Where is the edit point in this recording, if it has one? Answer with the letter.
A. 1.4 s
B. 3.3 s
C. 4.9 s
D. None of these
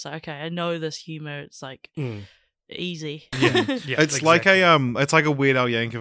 B